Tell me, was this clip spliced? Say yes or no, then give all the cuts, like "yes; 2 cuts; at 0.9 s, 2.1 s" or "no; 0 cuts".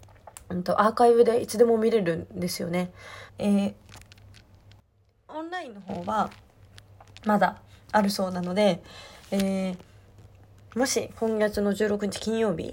yes; 1 cut; at 3.3 s